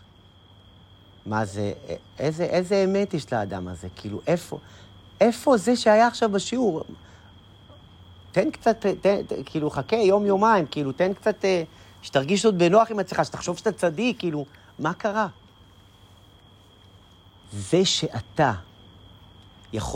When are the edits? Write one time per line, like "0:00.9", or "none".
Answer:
0:17.4